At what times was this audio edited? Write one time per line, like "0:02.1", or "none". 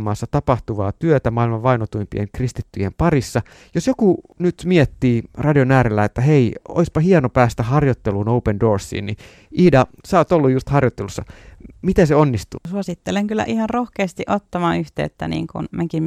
0:12.6